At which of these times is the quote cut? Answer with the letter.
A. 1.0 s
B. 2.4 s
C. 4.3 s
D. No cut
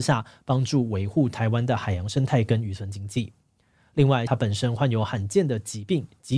C